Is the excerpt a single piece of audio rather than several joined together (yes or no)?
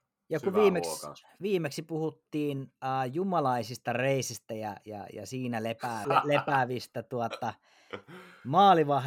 no